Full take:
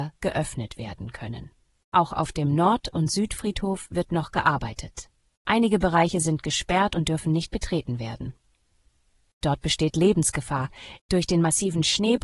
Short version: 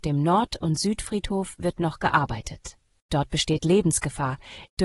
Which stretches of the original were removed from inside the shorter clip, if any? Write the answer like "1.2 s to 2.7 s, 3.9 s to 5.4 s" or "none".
5.2 s to 9.2 s